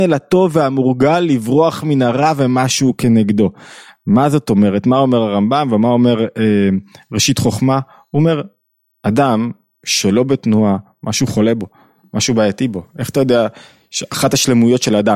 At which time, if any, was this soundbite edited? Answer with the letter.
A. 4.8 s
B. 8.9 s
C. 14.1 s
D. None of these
D